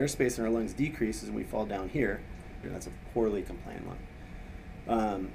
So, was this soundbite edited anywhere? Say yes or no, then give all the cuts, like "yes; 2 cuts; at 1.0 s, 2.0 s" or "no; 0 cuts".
yes; 1 cut; at 2.6 s